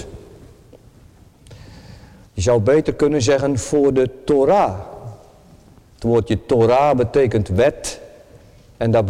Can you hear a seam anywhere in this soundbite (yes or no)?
no